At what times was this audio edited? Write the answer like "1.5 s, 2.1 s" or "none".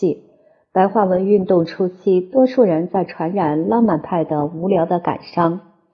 none